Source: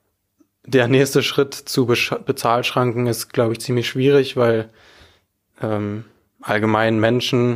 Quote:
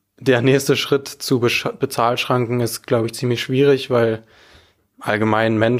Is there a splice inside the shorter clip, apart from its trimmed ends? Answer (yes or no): yes